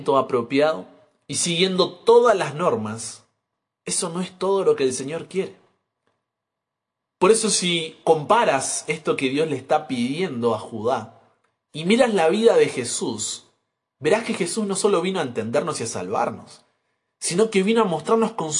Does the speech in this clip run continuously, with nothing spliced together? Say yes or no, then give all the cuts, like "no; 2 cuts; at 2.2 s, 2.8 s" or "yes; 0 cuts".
yes; 0 cuts